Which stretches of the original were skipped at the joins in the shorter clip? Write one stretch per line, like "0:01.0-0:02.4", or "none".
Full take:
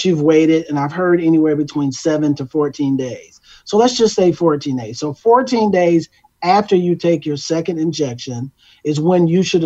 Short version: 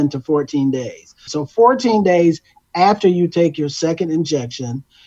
0:03.5-0:04.9